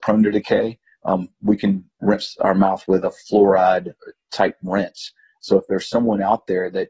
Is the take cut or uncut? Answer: uncut